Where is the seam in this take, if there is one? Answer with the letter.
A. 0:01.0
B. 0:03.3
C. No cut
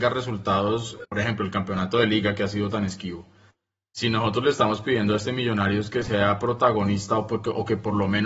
A